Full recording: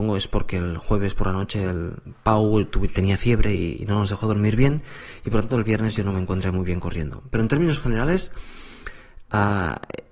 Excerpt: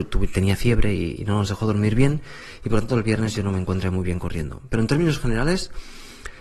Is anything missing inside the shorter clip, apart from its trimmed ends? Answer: no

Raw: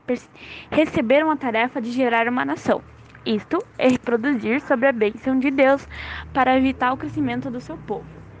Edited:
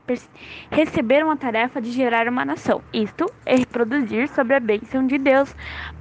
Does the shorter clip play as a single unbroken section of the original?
no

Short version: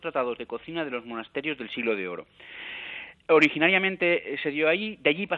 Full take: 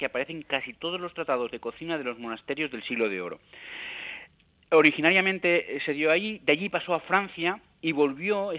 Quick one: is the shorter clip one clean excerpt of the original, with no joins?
no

